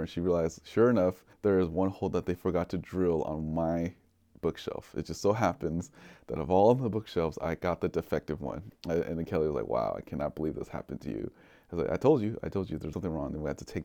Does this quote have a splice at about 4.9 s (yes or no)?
no